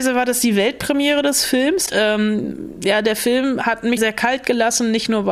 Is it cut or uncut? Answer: cut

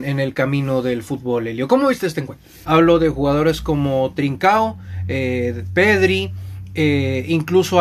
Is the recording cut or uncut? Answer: cut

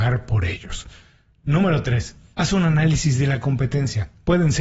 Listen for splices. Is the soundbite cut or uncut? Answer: uncut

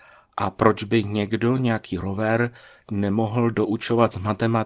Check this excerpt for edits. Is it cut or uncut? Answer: uncut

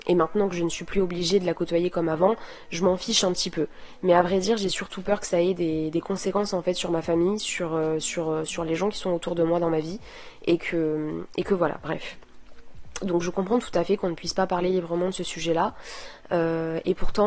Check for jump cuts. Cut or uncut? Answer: uncut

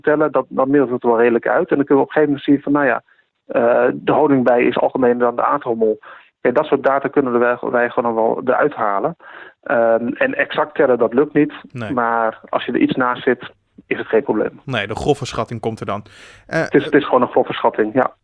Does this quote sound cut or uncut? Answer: uncut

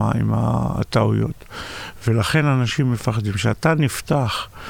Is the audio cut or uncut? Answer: uncut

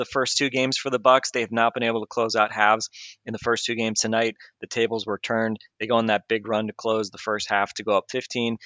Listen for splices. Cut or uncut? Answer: uncut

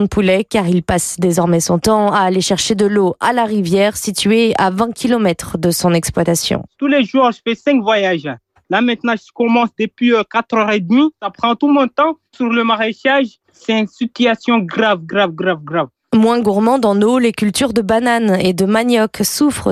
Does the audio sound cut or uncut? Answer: cut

